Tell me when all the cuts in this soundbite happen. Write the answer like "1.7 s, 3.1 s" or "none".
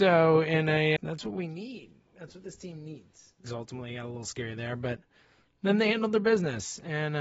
1.0 s, 3.4 s